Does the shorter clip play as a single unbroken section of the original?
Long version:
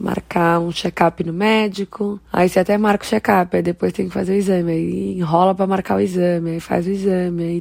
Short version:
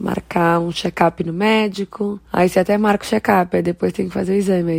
yes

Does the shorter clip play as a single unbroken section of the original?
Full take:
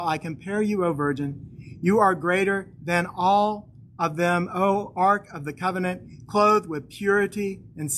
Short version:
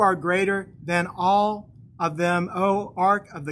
yes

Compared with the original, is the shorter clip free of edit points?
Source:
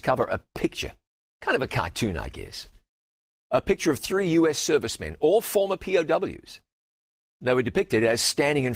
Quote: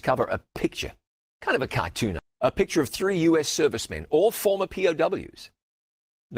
no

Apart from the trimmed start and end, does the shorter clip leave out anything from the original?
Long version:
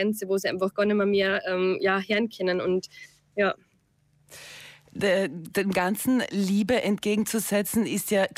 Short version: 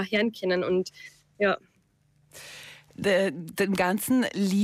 no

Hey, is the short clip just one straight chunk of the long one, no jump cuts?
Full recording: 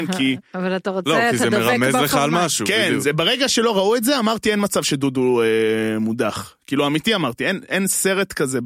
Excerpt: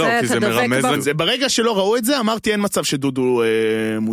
no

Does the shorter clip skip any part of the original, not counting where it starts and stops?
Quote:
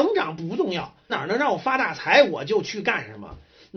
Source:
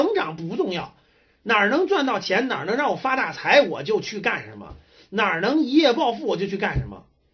yes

